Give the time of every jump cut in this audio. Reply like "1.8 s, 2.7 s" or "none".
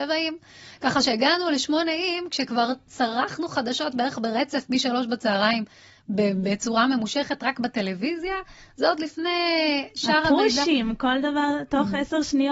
none